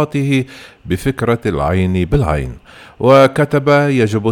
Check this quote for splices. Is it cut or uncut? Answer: uncut